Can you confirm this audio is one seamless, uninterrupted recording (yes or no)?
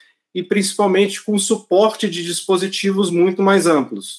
yes